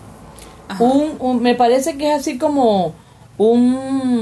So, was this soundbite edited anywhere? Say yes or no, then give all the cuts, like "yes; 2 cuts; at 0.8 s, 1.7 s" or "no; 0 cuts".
yes; 1 cut; at 1.2 s